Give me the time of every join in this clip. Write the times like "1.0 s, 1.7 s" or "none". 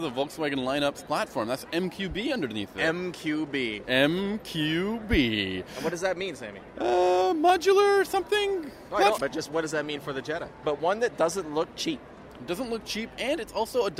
9.2 s, 10.6 s